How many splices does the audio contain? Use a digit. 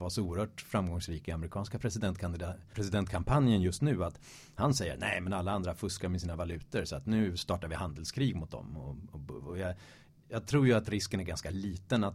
1